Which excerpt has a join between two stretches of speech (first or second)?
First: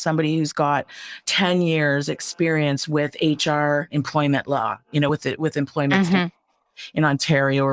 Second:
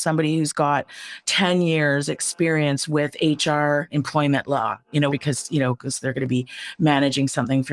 second